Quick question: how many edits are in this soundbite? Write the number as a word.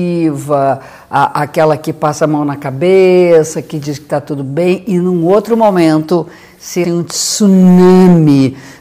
one